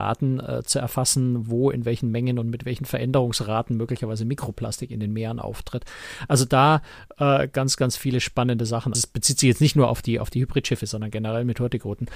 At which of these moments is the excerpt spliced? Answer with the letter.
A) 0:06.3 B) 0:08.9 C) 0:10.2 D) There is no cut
B